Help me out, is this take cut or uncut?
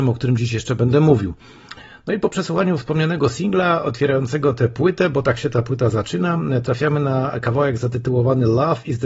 uncut